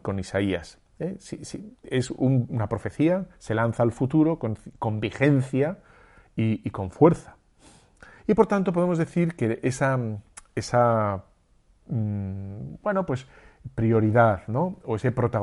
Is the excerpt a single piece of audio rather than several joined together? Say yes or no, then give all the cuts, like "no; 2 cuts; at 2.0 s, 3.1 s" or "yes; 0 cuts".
yes; 0 cuts